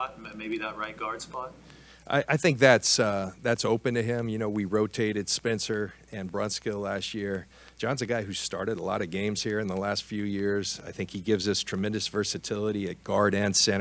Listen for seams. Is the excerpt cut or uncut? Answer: uncut